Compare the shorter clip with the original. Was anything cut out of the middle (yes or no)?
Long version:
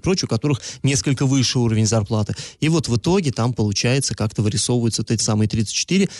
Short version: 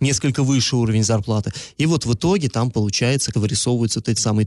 yes